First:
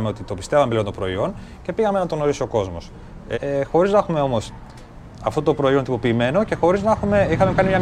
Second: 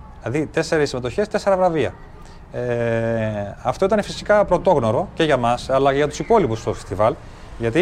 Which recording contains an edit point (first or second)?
first